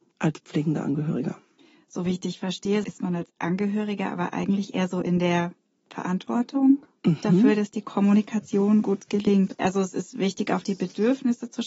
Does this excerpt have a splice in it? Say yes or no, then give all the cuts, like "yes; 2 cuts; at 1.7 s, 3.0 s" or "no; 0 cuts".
no; 0 cuts